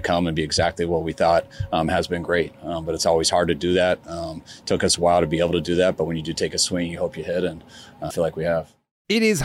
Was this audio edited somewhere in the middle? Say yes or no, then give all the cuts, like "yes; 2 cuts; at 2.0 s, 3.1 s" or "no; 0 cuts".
yes; 1 cut; at 8.1 s